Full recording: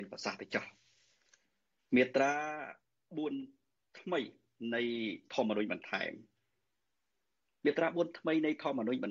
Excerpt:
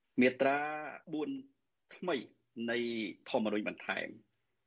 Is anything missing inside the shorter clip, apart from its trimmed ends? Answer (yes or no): yes